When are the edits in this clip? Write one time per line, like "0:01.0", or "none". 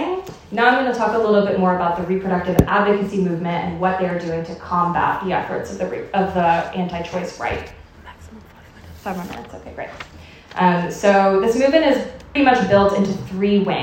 0:12.4